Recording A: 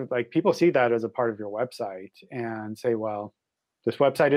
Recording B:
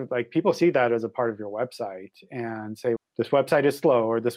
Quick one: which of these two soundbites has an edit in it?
B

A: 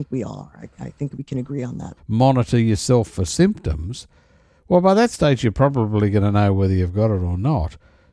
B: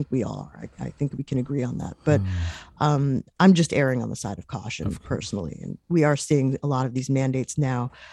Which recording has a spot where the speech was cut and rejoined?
A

